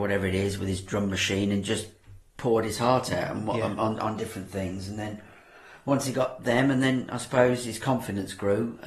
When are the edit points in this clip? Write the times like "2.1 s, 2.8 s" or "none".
none